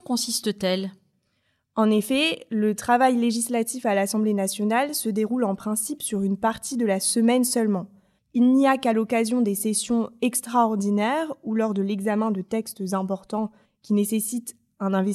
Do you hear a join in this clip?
yes; 1 cut; at 8.2 s

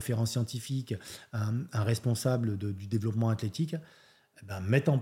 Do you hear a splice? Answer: no; 0 cuts

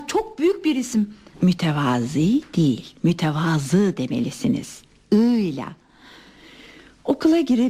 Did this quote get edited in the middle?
yes; 1 cut; at 1.3 s

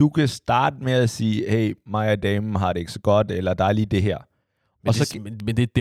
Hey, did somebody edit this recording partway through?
no; 0 cuts

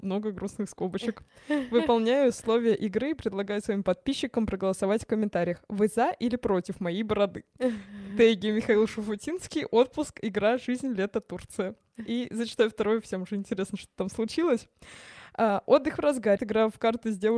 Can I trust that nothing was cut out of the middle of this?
no; 1 cut; at 16.4 s

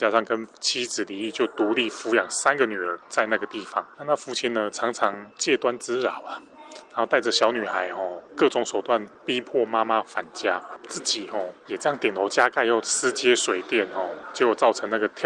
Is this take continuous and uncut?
yes; 0 cuts

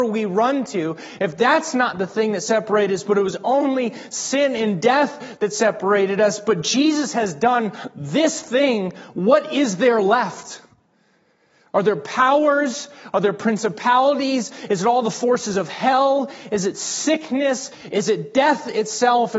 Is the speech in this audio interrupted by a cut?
no; 0 cuts

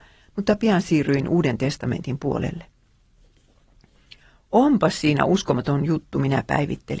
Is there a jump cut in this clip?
no; 0 cuts

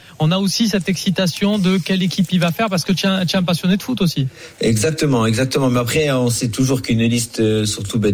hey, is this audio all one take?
yes; 0 cuts

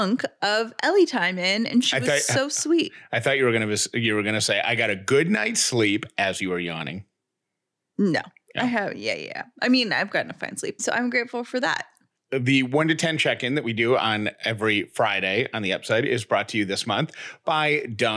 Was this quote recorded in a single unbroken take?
no; 2 cuts; at 10.8 s, 12.2 s

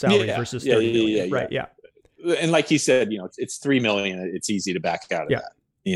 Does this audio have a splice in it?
no; 0 cuts

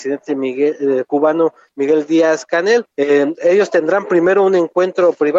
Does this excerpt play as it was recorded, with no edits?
no; 1 cut; at 2.9 s

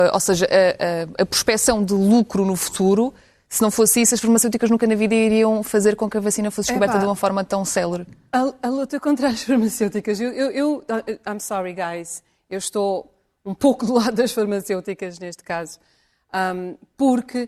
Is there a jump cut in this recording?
no; 0 cuts

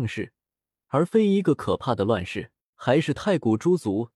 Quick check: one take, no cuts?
no; 1 cut; at 2.7 s

